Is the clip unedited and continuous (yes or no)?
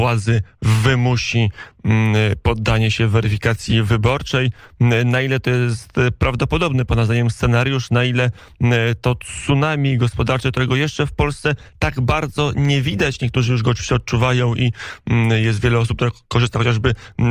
yes